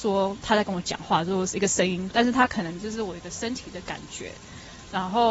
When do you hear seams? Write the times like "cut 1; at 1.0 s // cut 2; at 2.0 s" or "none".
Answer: cut 1; at 2.1 s